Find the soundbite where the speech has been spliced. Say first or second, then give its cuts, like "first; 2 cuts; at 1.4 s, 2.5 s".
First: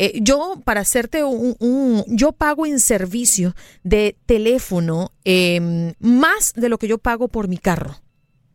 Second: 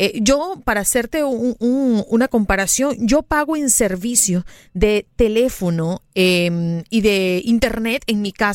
first; 2 cuts; at 2.1 s, 5.9 s